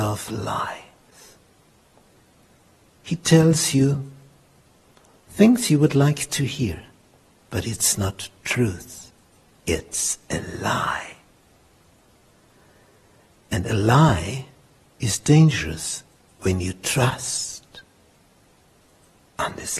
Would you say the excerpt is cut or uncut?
uncut